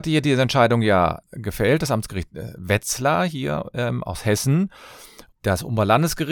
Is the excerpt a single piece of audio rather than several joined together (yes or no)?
no